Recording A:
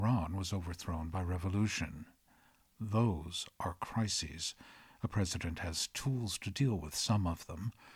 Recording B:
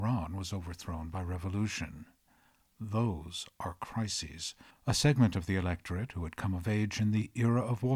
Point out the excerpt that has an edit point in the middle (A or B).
B